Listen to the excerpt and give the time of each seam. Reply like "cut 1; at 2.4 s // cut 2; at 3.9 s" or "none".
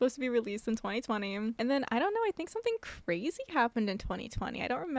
none

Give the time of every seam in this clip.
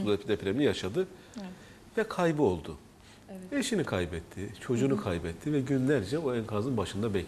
none

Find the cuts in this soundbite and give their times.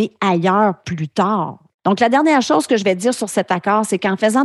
cut 1; at 1.7 s

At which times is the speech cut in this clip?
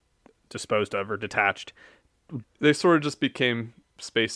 cut 1; at 2.4 s

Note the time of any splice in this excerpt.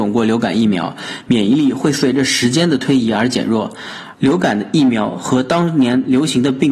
cut 1; at 4.1 s

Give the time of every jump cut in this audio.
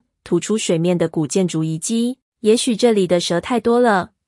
cut 1; at 2.2 s

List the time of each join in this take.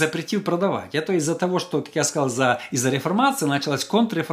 none

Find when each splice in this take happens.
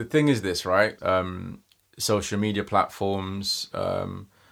cut 1; at 1.0 s

